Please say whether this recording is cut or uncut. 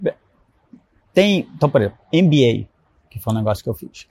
uncut